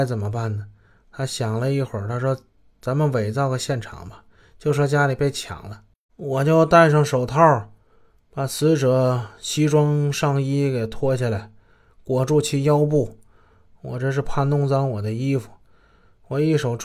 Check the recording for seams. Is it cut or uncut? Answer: cut